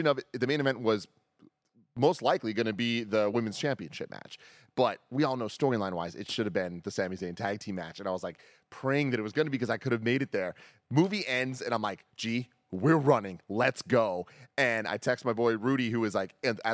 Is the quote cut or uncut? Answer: uncut